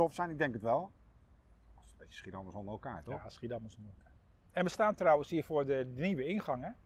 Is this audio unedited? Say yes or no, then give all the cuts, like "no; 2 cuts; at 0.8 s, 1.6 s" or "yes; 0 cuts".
yes; 0 cuts